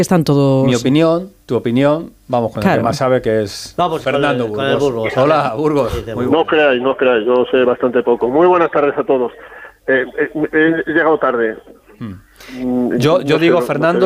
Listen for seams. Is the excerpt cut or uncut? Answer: cut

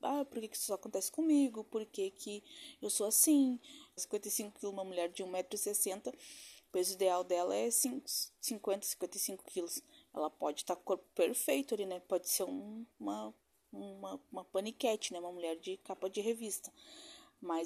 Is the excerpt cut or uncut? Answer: cut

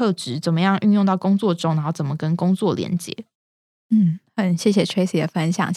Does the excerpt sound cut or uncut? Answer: uncut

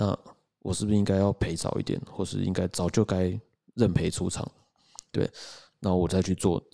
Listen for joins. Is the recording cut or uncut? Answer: uncut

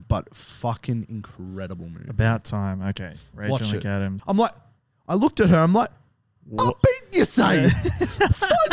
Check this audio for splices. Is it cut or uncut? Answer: cut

